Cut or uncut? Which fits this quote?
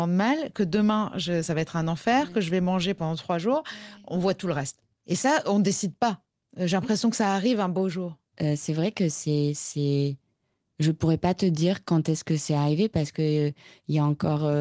uncut